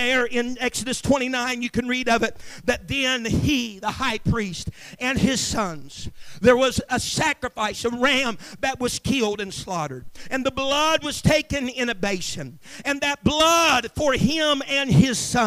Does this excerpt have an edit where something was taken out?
no; 0 cuts

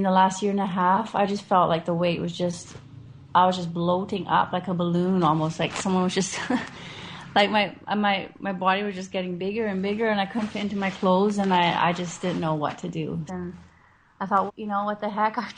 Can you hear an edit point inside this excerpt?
yes; 2 cuts; at 13.3 s, 14.5 s

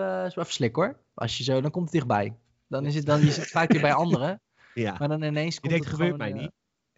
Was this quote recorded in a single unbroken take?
yes; 0 cuts

